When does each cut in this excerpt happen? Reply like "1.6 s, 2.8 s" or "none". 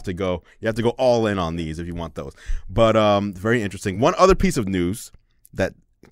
none